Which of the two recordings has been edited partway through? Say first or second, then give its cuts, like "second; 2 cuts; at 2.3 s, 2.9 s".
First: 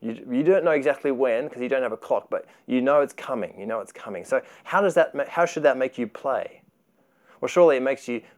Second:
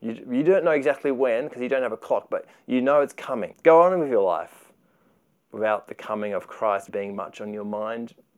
second; 2 cuts; at 3.5 s, 6.9 s